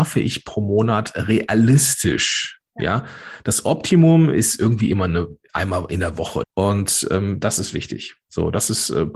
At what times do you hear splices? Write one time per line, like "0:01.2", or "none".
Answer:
0:06.4